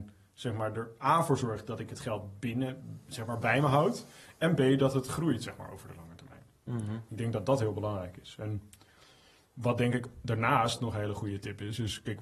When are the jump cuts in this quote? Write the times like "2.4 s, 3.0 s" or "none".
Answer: none